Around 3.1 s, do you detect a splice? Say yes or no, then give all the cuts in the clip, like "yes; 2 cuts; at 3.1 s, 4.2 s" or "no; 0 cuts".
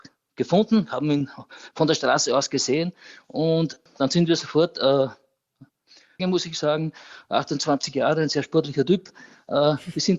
no; 1 cut; at 6.2 s